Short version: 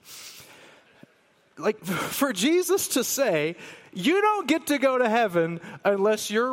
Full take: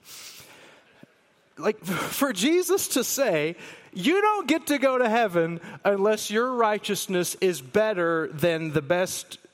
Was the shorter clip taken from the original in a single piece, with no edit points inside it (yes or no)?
yes